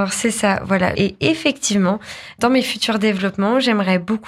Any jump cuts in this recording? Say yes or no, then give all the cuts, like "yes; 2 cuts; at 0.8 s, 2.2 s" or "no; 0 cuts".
yes; 1 cut; at 0.9 s